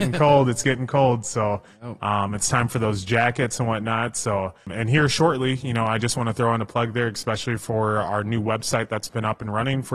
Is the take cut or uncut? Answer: uncut